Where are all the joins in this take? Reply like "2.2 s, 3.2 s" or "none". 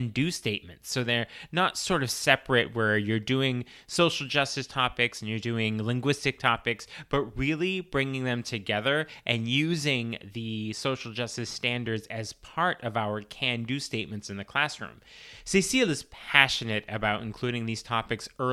none